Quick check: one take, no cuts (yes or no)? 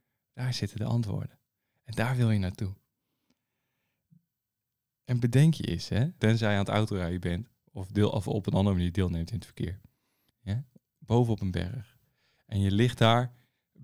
no